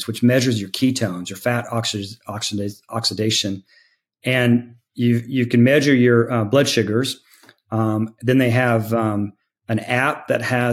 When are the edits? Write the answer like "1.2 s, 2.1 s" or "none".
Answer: none